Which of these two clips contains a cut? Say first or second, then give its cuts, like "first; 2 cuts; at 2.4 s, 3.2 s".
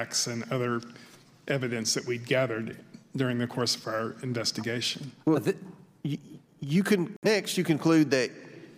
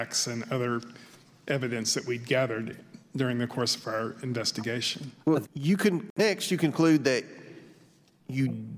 second; 1 cut; at 5.4 s